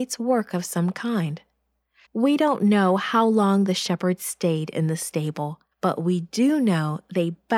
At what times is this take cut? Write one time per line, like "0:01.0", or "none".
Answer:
0:02.0
0:05.7